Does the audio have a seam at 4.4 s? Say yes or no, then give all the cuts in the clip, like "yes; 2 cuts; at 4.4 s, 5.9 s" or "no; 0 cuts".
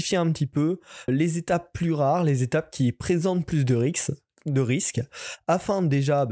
no; 1 cut; at 1.1 s